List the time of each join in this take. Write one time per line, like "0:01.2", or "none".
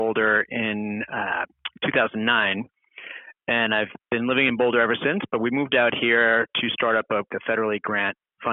0:07.3